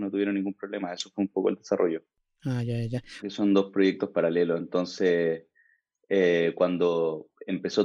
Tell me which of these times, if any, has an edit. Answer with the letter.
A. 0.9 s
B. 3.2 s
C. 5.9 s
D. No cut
B